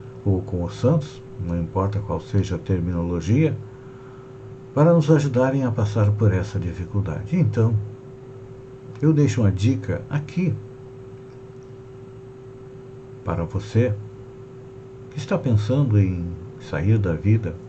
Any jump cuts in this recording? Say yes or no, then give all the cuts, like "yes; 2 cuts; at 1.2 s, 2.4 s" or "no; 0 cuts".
no; 0 cuts